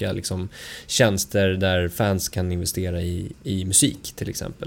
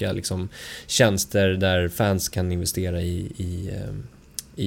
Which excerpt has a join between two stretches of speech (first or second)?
first